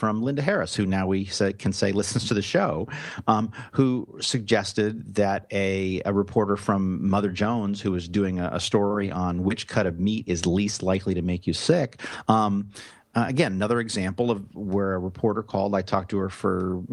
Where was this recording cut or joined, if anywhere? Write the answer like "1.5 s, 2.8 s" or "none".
none